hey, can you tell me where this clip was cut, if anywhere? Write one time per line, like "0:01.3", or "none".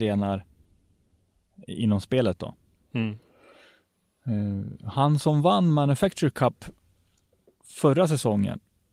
none